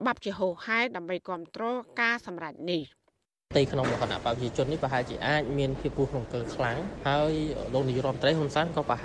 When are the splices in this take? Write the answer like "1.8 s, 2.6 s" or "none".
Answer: 5.9 s